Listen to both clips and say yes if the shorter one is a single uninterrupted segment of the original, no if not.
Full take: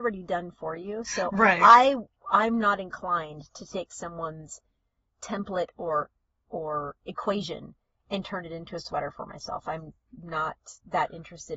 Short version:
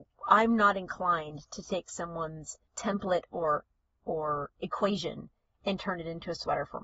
no